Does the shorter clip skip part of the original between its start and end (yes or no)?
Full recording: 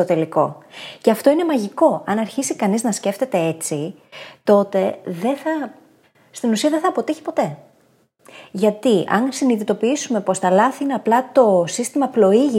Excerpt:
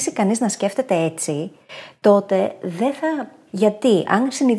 yes